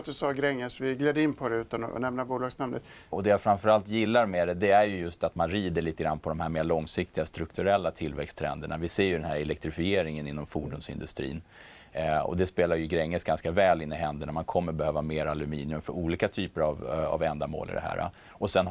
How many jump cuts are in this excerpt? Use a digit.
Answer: 1